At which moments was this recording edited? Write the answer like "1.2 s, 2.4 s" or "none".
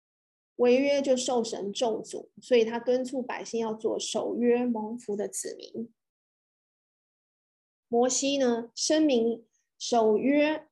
7.8 s